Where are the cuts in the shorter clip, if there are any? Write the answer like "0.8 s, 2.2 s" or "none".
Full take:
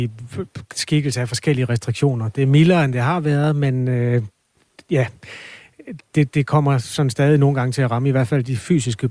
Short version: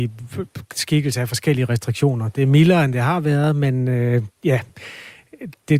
4.4 s